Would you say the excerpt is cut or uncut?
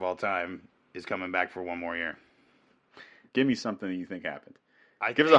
cut